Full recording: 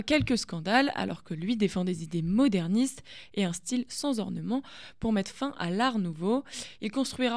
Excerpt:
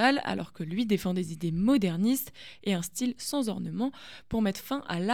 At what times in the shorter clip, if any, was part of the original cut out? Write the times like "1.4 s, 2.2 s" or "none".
none